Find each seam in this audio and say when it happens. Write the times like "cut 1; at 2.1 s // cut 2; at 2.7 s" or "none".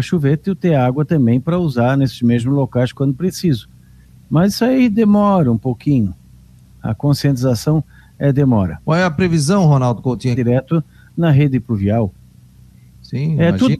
cut 1; at 8.8 s // cut 2; at 10.3 s